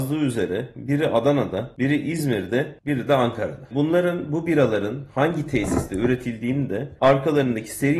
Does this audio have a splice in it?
no; 0 cuts

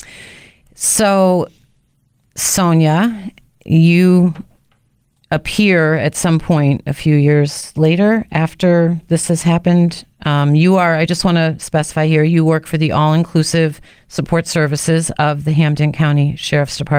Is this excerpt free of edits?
yes; 0 cuts

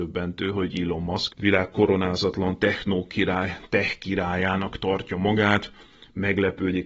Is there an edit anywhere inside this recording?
yes; 1 cut; at 1.3 s

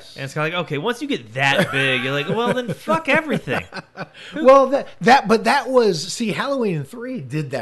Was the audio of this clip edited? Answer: no; 0 cuts

